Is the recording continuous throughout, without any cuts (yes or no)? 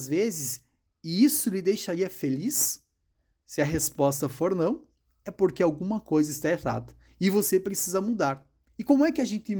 yes